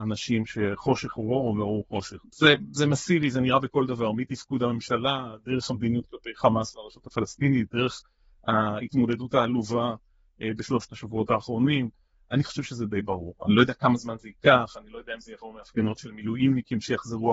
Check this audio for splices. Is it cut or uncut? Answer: cut